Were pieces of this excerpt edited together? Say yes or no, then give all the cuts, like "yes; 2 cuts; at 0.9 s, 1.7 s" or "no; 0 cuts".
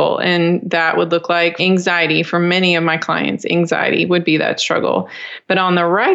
yes; 1 cut; at 1.6 s